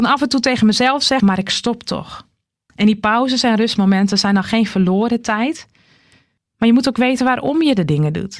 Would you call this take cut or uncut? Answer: cut